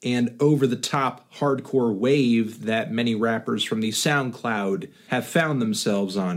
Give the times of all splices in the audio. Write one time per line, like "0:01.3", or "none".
0:05.1